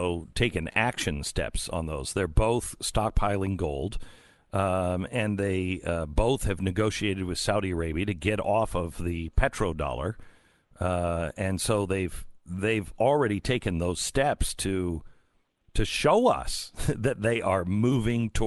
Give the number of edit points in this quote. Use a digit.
0